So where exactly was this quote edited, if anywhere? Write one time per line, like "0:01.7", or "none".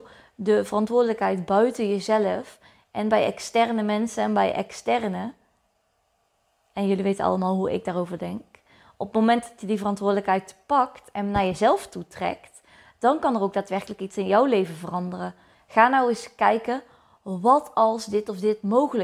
0:15.5